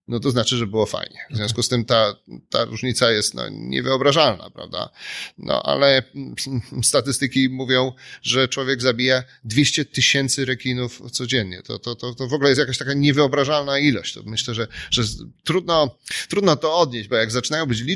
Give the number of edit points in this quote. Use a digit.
0